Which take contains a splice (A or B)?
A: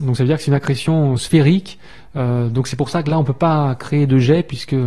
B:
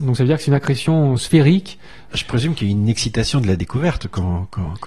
B